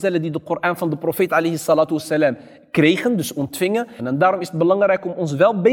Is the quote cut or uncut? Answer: cut